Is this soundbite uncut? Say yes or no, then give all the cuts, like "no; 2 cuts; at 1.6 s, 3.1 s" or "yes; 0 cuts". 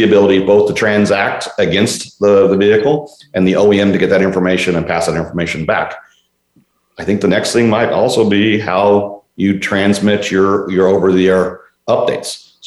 yes; 0 cuts